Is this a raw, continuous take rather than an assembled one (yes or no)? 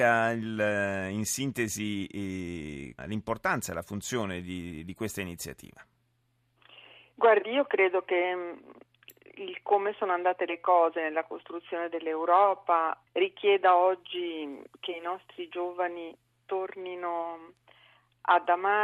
no